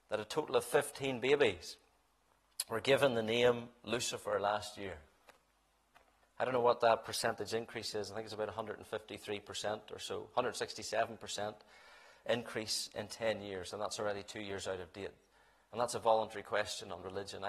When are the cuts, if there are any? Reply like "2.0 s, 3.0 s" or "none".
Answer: 6.2 s

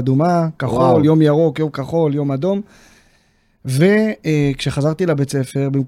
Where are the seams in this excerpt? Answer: none

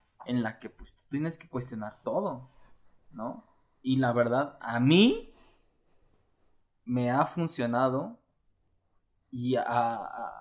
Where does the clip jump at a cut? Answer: none

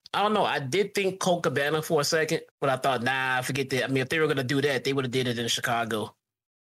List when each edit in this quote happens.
2.5 s

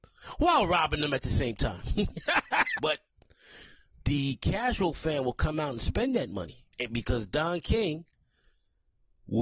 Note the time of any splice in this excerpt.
2.8 s, 6.7 s

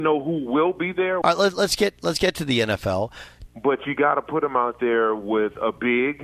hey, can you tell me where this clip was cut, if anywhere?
1.2 s, 3.5 s

